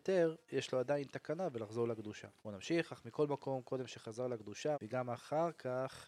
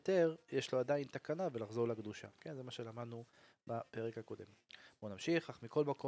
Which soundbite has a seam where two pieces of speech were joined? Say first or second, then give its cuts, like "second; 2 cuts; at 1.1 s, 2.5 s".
first; 2 cuts; at 2.4 s, 4.7 s